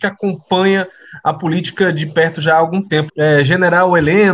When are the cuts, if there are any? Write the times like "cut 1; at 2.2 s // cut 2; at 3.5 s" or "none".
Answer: cut 1; at 3.1 s